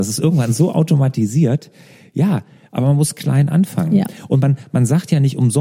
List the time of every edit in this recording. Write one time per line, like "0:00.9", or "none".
none